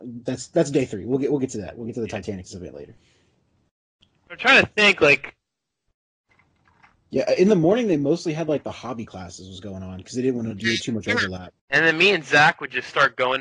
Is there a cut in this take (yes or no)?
yes